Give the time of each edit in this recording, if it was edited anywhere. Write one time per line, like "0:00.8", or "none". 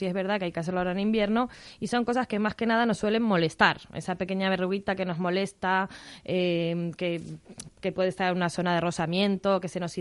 none